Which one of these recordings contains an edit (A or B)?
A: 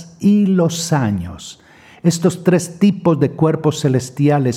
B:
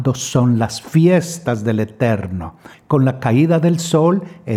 B